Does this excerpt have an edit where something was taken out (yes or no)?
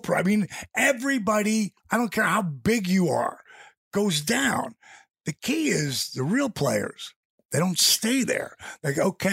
no